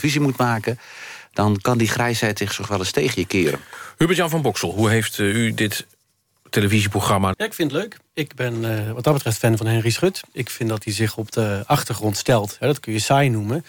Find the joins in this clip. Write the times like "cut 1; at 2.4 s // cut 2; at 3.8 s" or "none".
cut 1; at 7.3 s